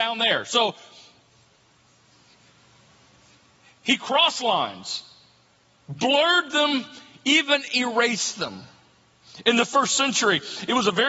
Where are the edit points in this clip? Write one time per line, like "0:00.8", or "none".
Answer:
none

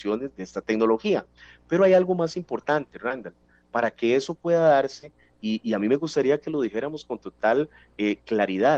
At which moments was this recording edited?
none

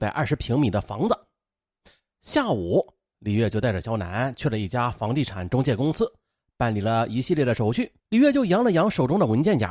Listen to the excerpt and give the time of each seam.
0:08.0

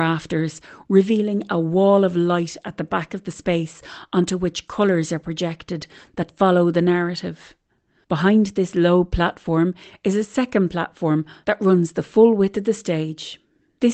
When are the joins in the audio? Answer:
0:08.0
0:11.4

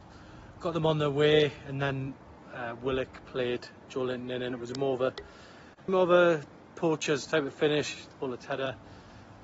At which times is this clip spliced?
0:05.9
0:08.1

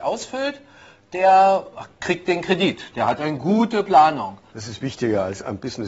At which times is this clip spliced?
0:04.5

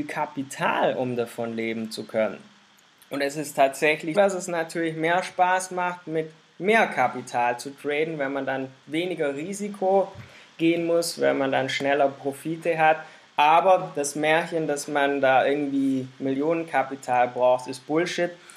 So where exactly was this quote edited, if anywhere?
0:04.1

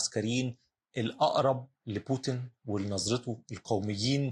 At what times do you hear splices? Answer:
0:01.8

